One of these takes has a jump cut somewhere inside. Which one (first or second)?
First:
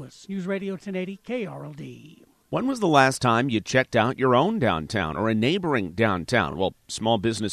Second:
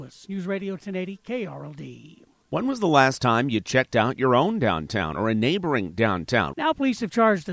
second